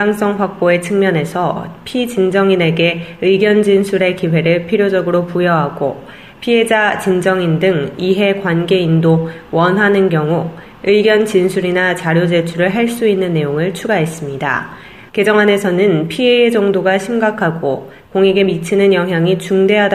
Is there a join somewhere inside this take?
yes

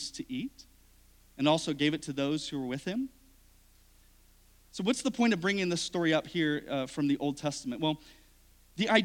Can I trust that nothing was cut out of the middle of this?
yes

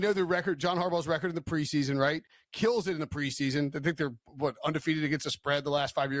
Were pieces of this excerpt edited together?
no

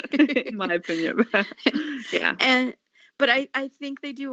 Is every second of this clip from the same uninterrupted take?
yes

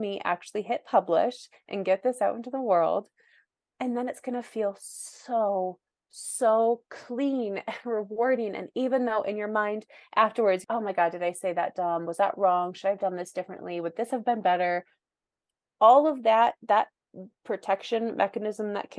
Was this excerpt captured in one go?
no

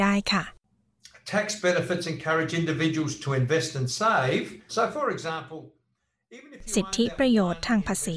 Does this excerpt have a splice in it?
yes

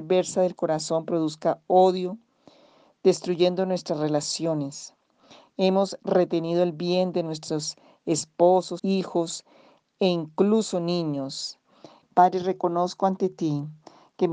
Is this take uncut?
no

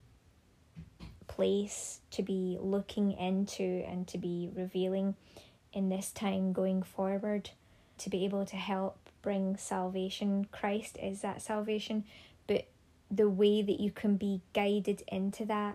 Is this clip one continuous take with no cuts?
no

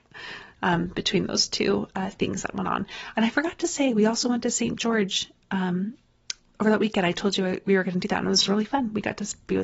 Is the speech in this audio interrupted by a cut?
no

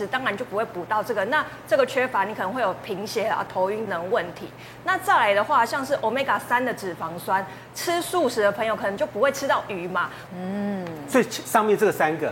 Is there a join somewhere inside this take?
yes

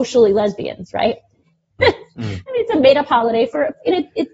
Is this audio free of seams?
no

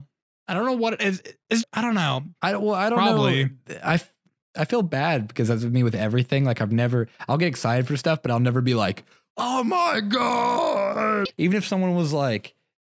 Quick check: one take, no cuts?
no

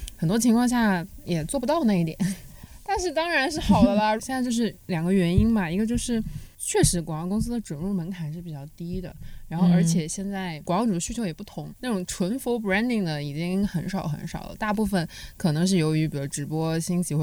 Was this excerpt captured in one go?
no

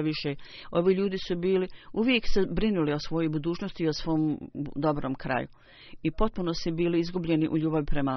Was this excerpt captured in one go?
yes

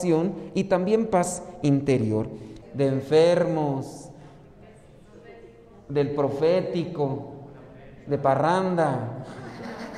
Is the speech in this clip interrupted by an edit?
yes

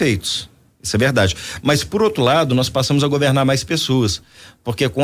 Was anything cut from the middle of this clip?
no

